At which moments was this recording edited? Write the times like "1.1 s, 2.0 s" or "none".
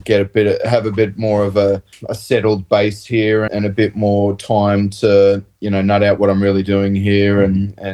3.5 s